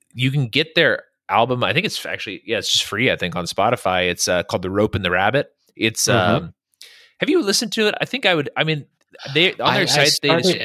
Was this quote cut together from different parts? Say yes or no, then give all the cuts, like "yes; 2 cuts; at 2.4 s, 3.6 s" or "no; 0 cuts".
no; 0 cuts